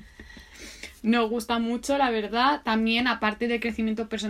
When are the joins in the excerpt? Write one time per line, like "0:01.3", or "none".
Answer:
none